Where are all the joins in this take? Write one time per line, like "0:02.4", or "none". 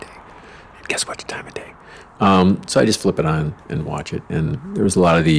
none